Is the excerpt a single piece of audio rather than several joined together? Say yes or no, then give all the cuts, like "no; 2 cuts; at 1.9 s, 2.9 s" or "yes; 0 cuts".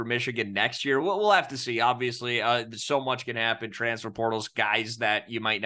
yes; 0 cuts